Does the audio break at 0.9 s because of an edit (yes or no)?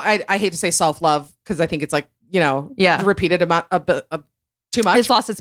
no